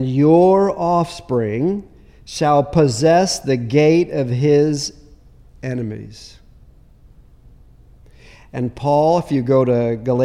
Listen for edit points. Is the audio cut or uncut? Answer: uncut